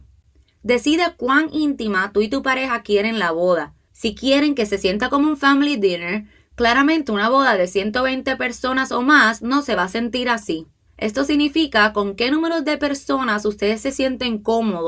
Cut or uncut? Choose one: cut